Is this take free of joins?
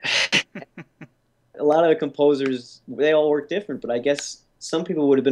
no; 1 cut; at 1.5 s

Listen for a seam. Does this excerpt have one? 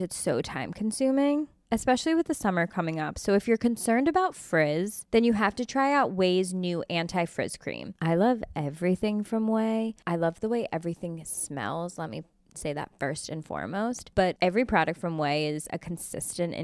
no; 0 cuts

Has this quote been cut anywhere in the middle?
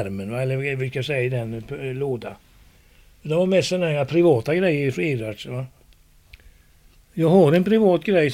no; 0 cuts

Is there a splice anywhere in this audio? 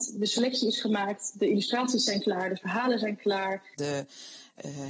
yes; 1 cut; at 3.7 s

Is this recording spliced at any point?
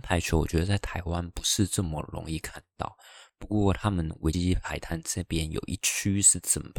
yes; 1 cut; at 4.3 s

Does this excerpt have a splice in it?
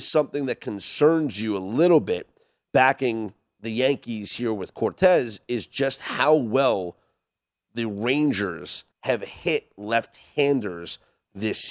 yes; 1 cut; at 8.9 s

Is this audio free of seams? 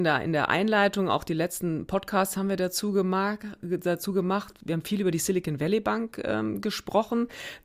yes; 0 cuts

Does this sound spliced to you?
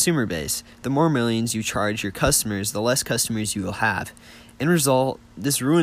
no; 0 cuts

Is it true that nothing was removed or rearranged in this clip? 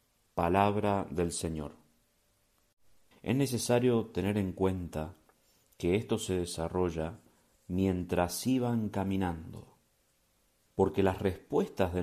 no; 2 cuts; at 3.1 s, 10.7 s

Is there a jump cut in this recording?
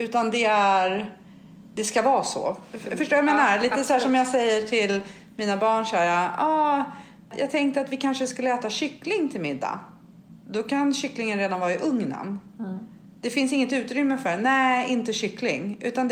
no; 0 cuts

